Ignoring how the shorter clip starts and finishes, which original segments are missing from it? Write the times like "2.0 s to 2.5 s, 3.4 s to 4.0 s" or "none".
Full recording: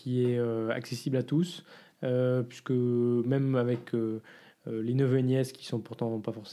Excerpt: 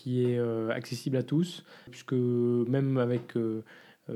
1.9 s to 2.4 s